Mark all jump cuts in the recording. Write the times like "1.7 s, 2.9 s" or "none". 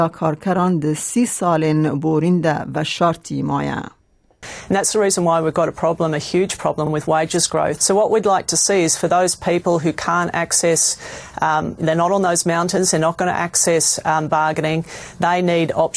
7.8 s